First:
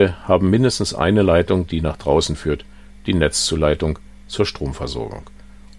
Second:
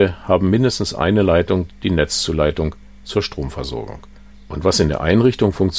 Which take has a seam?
second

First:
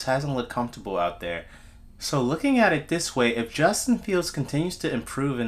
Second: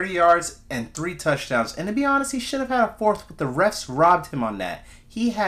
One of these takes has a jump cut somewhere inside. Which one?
first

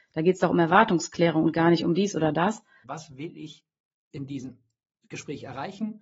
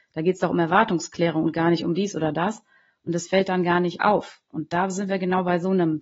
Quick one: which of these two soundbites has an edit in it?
first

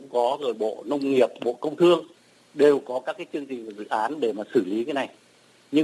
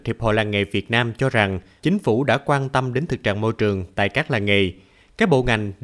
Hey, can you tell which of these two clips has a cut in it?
second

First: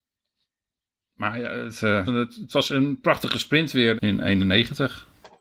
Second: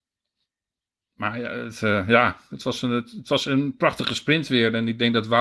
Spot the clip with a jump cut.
first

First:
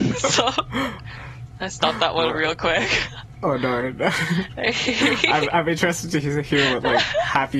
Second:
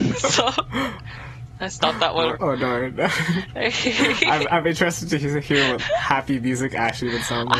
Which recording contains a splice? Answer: second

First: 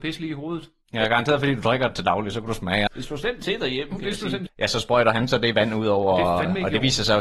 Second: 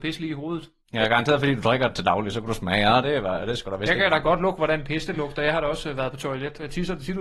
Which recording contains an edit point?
first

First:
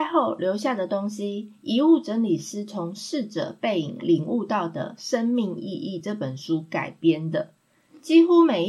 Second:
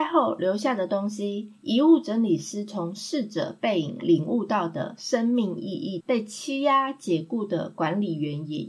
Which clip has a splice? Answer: second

